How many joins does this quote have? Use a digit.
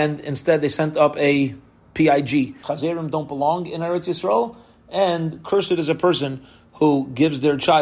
1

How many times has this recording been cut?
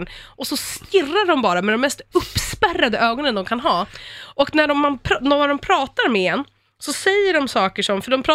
0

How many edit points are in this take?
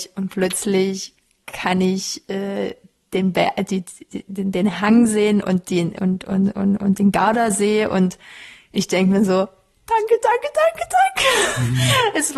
1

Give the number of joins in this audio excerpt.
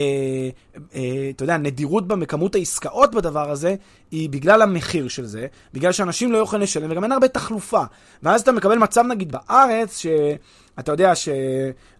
0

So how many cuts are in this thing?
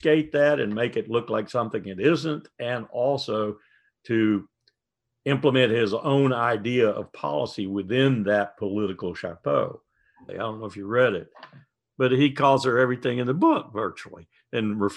1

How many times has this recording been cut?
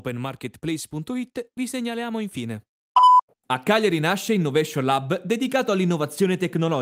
1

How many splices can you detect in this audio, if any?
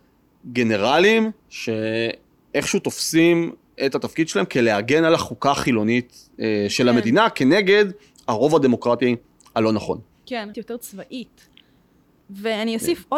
2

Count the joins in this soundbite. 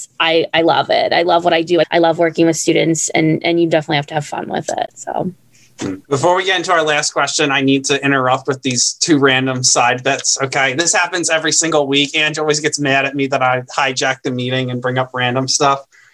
2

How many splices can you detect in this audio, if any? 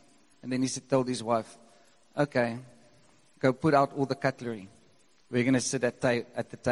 1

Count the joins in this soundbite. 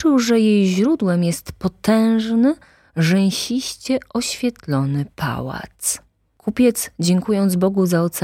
0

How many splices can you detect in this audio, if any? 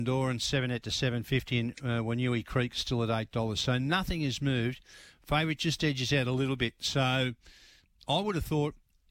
0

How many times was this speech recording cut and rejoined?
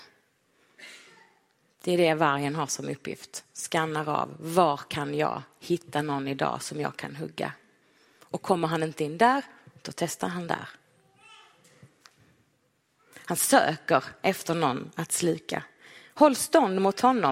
0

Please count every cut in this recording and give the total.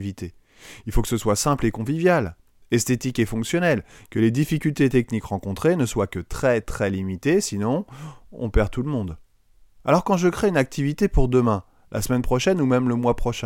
1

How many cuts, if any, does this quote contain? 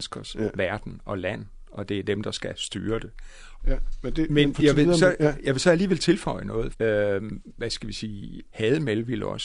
3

